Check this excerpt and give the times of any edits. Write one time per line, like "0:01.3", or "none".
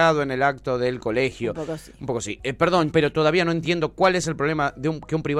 0:02.9